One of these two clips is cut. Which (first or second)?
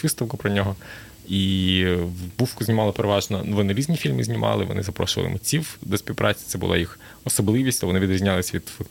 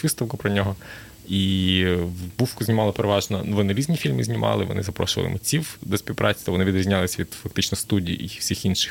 second